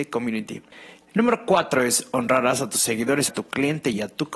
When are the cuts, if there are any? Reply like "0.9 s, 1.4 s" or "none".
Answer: 1.0 s, 3.3 s